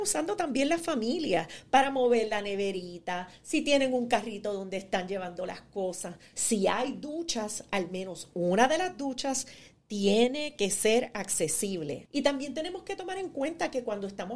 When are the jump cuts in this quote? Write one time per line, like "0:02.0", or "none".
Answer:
0:06.3
0:12.1